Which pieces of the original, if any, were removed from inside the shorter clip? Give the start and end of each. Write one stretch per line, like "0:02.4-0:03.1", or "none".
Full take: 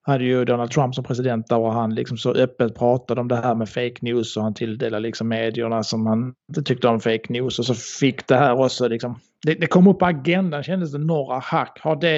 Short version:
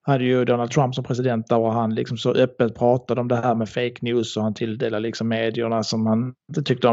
none